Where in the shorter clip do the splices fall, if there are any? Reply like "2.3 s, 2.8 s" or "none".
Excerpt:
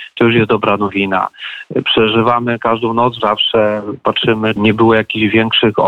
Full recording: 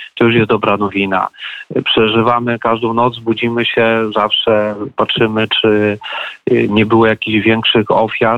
3.2 s, 4.6 s